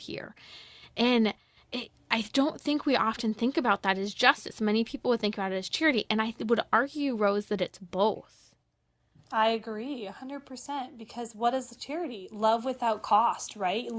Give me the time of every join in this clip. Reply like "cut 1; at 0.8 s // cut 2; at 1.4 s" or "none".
none

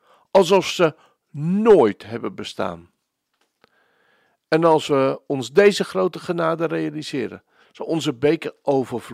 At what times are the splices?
none

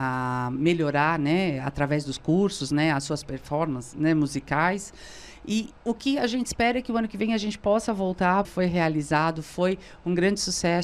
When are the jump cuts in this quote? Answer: cut 1; at 5.8 s // cut 2; at 8.4 s

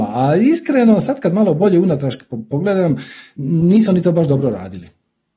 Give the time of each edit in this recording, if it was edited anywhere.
none

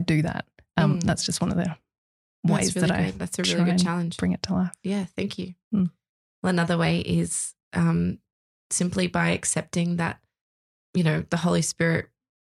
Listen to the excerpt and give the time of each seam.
none

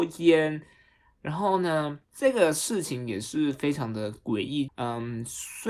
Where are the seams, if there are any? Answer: cut 1; at 2.0 s // cut 2; at 4.7 s

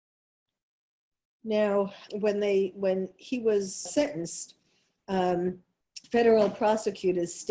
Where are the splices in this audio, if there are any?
cut 1; at 2.1 s // cut 2; at 3.9 s

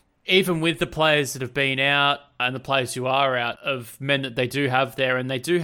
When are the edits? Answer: cut 1; at 2.4 s // cut 2; at 3.6 s

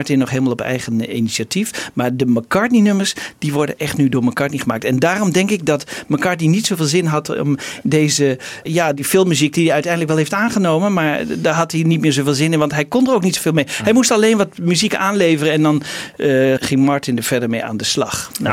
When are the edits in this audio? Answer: cut 1; at 8.7 s // cut 2; at 16.6 s

